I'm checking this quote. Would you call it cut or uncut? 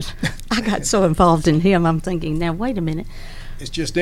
uncut